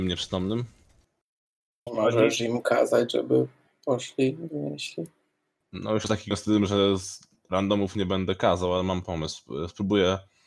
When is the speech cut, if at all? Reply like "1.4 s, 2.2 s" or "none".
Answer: 1.9 s